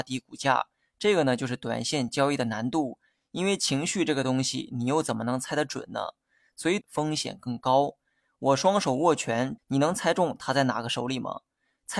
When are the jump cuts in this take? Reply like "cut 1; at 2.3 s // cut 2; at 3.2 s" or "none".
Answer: cut 1; at 6.8 s // cut 2; at 9.6 s